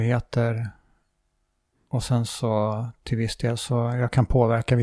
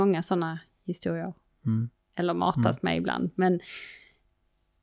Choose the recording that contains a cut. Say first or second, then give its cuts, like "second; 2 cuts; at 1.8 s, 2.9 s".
second; 1 cut; at 2.0 s